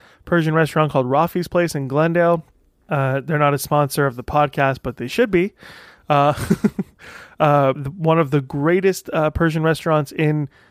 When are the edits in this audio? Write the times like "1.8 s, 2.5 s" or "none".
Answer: 7.7 s